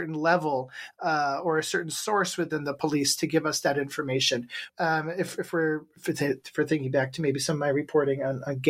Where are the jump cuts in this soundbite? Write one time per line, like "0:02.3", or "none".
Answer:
0:04.7